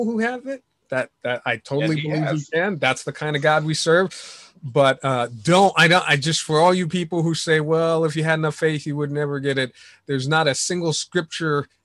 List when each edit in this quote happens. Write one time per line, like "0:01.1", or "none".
none